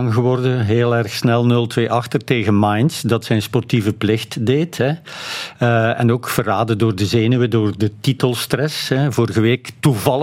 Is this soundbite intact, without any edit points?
yes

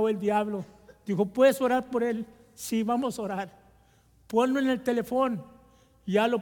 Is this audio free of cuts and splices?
yes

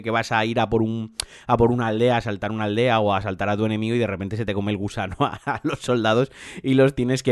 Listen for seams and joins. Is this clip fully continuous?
yes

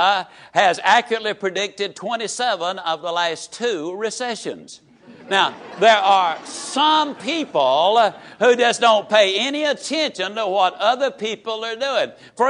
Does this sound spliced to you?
no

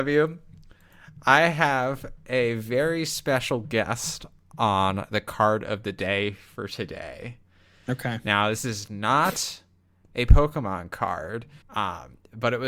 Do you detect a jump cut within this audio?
yes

